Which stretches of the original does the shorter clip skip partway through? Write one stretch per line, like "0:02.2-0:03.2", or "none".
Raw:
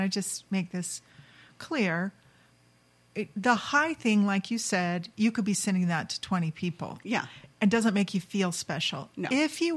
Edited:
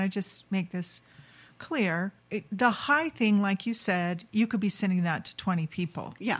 0:02.2-0:03.0